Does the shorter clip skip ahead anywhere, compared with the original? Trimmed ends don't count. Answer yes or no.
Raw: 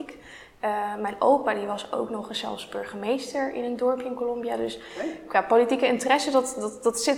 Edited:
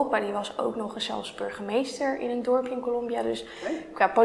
no